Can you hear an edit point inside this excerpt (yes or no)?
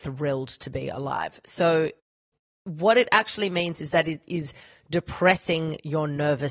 no